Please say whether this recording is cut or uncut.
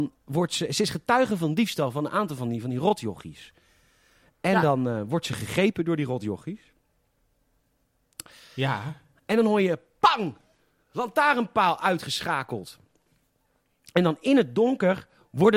uncut